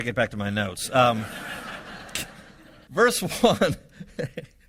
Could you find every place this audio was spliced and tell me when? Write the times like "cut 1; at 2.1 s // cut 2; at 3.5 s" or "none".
cut 1; at 2.9 s